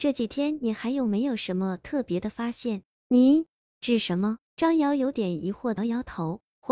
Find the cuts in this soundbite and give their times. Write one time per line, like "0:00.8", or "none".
0:04.5
0:05.8